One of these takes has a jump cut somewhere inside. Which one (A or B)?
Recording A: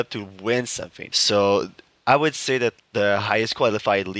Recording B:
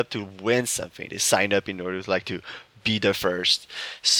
A